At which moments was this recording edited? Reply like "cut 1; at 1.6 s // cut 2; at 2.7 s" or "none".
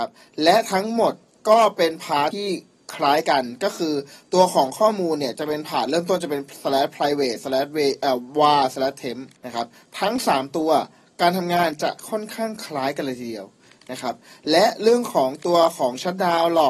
cut 1; at 2.3 s // cut 2; at 9.4 s